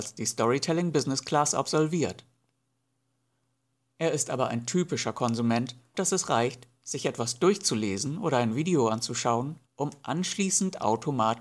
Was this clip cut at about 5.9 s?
yes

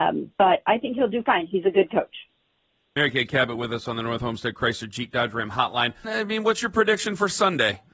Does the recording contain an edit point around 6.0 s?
yes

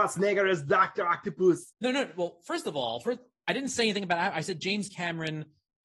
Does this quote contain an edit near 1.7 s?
yes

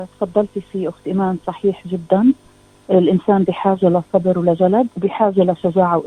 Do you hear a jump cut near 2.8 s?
no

